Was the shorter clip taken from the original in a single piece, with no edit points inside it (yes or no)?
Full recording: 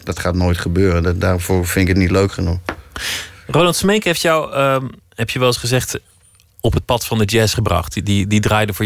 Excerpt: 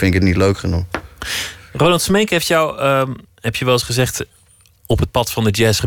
yes